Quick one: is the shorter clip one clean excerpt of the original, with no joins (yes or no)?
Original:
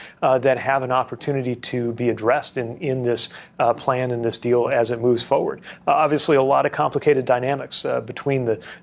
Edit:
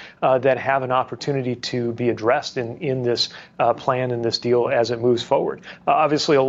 yes